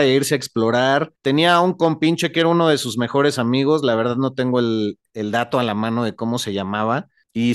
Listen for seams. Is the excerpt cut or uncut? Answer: uncut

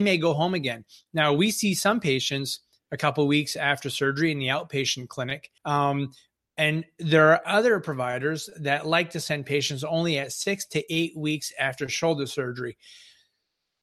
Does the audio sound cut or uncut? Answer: cut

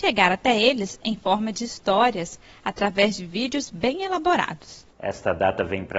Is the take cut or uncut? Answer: cut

